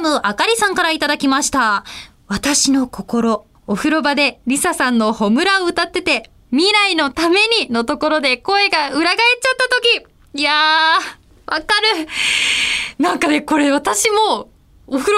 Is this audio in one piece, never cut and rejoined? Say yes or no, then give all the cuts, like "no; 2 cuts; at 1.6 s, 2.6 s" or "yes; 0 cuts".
no; 1 cut; at 3.5 s